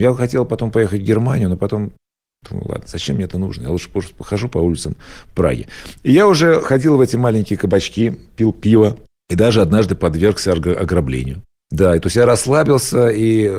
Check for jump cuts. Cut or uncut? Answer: uncut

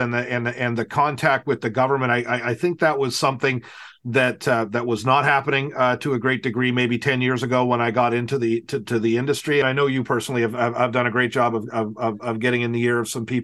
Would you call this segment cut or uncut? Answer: cut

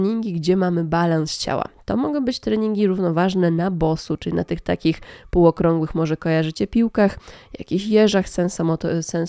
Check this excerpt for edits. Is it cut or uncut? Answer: uncut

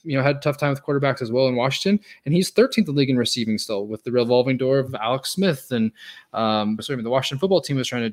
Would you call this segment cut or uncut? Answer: cut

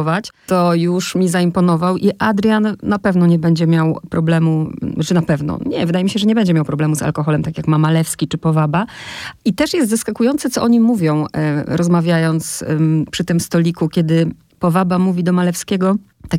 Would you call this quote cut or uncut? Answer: uncut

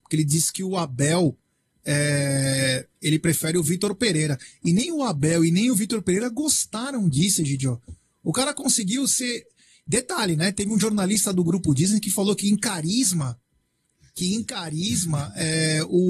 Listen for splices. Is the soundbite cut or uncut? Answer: uncut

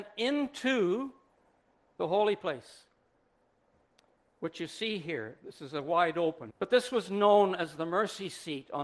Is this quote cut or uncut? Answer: cut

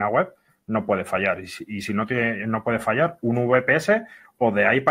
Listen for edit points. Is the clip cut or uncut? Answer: uncut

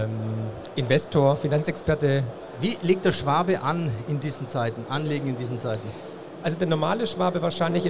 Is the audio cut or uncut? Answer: uncut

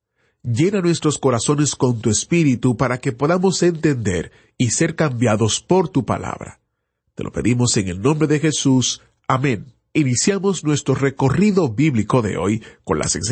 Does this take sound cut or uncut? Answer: uncut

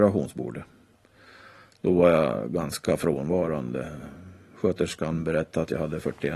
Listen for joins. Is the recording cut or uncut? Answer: uncut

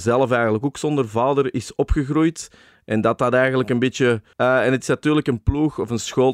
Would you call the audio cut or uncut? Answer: cut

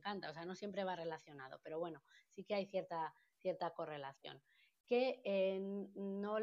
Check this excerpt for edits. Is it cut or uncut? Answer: uncut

